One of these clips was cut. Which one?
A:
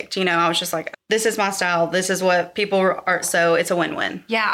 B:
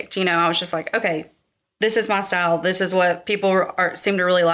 A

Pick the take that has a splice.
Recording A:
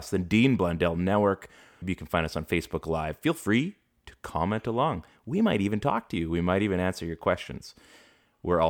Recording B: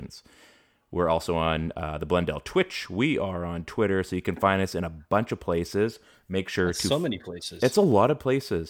A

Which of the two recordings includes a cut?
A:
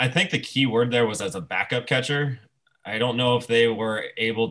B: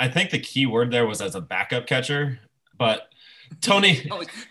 B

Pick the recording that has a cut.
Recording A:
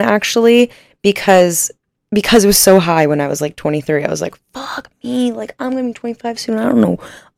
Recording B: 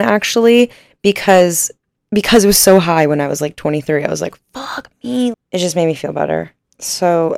B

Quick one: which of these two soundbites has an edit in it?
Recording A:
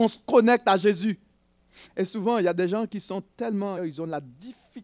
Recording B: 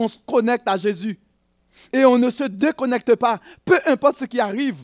A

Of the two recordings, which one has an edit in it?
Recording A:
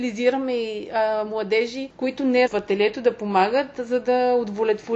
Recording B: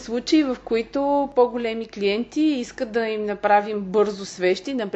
A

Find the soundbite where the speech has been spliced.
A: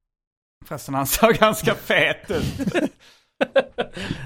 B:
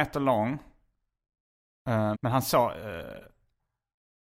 B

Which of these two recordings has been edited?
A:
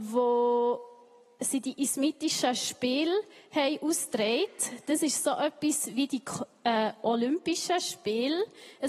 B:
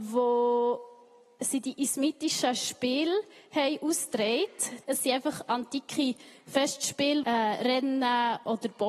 B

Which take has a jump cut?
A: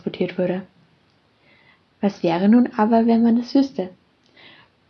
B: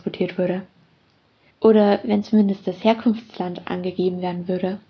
B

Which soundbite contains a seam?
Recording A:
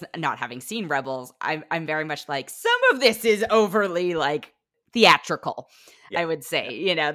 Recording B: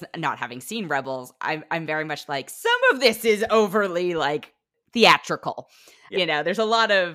B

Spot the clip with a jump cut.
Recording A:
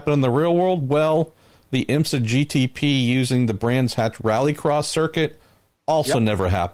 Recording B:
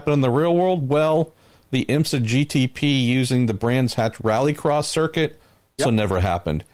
B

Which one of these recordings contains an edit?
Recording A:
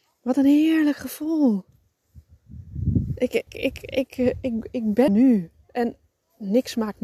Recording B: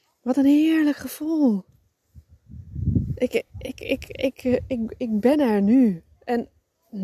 A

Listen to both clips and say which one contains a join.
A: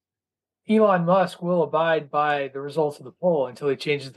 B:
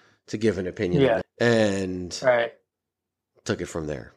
B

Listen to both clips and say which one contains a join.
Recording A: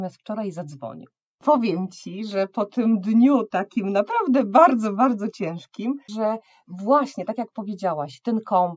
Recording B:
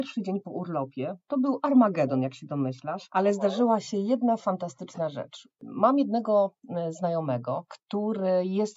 A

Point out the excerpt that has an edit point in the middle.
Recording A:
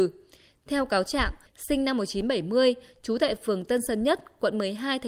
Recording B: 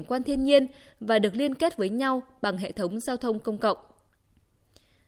A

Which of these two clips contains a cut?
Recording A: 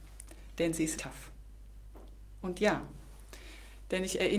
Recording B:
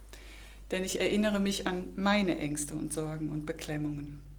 A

